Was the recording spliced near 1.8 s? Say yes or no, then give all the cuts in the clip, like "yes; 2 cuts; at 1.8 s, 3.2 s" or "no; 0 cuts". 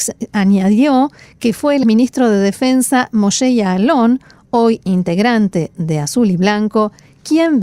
yes; 1 cut; at 1.8 s